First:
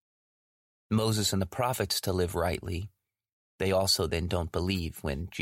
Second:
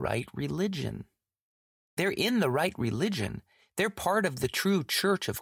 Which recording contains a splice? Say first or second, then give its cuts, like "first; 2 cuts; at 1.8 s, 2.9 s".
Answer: second; 1 cut; at 1.8 s